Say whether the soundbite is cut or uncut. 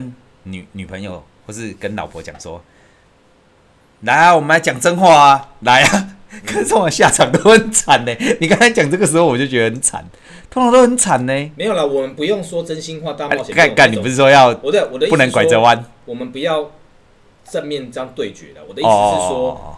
uncut